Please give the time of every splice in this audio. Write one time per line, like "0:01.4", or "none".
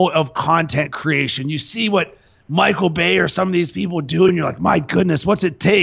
none